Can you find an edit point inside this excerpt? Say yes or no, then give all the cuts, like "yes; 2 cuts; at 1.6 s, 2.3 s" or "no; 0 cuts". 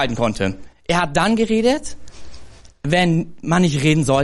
no; 0 cuts